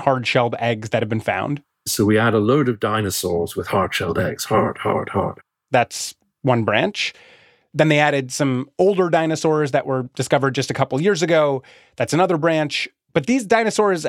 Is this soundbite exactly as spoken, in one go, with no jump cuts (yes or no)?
yes